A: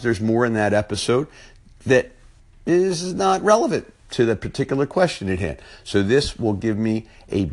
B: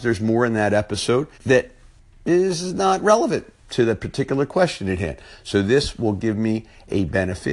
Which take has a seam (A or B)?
B